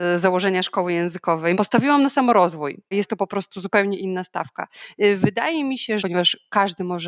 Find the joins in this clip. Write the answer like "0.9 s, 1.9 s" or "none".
1.5 s, 2.9 s, 6.0 s